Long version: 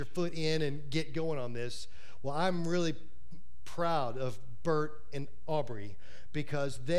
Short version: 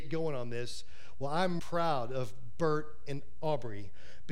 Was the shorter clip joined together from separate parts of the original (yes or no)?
yes